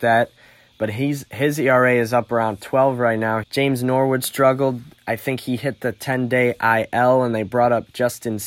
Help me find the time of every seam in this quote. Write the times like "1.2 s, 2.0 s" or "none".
3.4 s